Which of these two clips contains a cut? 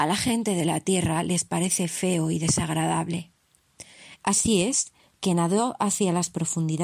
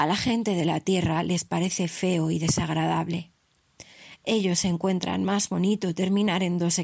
first; 1 cut; at 4.2 s

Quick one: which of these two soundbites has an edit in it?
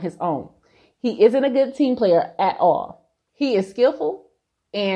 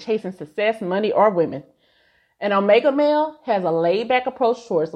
first; 1 cut; at 3.3 s

